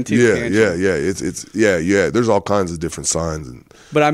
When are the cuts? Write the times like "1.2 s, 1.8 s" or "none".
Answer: none